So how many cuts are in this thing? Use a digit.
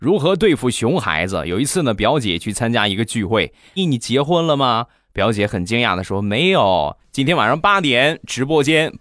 2